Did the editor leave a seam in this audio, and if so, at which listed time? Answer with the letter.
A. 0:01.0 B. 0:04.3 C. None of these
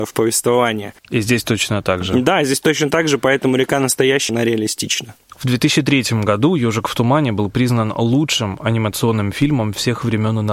B